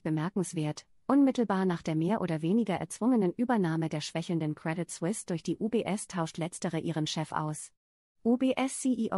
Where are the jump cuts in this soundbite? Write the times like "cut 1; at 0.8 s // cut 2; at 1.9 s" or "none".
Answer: none